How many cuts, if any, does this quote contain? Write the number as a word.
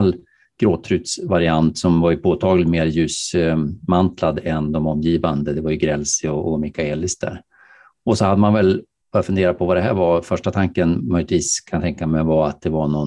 zero